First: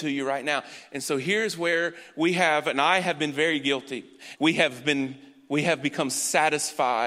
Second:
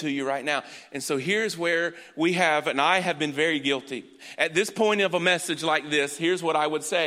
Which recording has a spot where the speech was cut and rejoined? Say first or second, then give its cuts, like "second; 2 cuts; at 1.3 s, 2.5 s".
first; 1 cut; at 4.4 s